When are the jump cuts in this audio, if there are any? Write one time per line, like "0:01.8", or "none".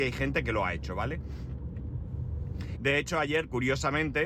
0:02.8